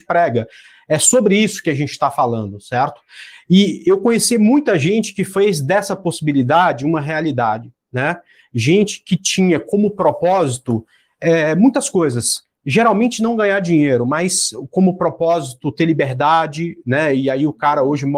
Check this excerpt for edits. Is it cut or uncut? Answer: uncut